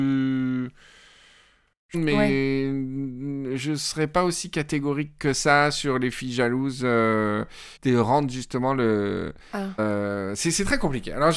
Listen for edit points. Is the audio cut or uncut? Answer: cut